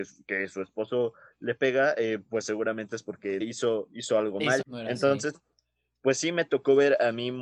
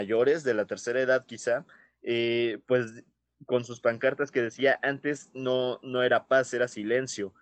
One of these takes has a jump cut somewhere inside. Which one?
first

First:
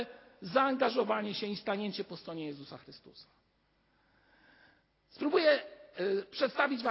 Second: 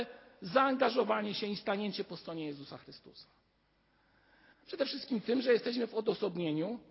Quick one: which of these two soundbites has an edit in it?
second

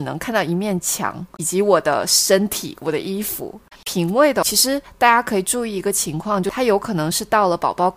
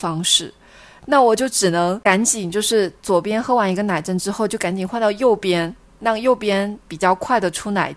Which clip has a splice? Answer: first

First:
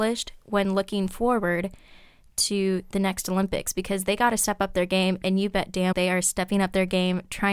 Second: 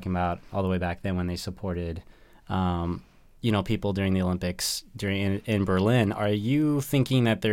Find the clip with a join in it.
first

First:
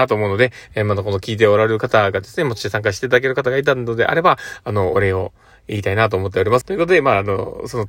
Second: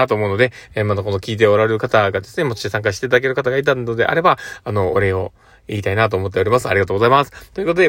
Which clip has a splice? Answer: first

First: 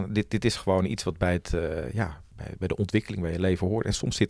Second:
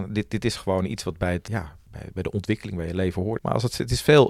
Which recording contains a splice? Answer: second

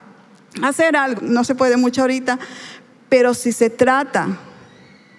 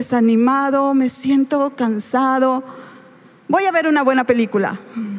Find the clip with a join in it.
first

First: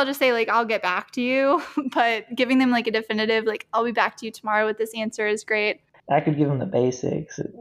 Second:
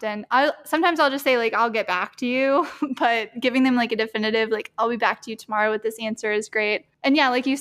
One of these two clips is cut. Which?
first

